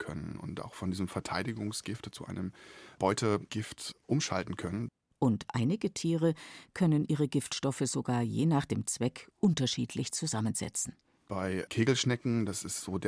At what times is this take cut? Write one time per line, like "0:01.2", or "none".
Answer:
0:05.1